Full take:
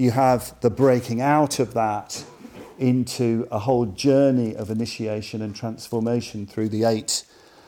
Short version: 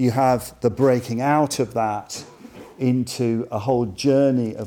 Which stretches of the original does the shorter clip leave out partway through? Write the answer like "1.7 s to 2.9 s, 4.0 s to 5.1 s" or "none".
none